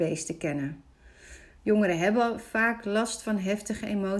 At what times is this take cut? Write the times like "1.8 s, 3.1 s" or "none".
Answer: none